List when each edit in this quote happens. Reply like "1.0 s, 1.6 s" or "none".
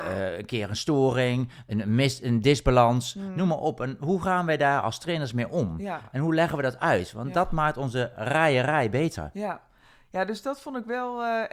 none